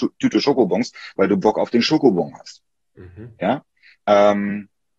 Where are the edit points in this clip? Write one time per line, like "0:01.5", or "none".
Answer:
0:03.9